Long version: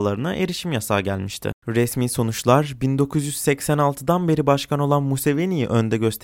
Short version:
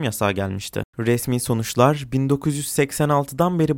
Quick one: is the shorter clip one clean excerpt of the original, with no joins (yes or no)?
yes